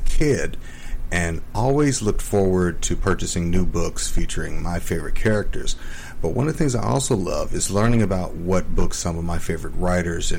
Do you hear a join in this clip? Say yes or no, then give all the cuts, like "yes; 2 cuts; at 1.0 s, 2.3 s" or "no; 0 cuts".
no; 0 cuts